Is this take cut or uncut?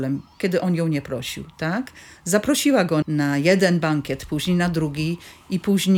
cut